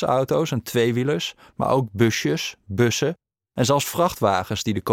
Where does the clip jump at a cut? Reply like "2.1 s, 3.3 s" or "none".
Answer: none